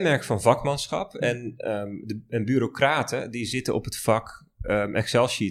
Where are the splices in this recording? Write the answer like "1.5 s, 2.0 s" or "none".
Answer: none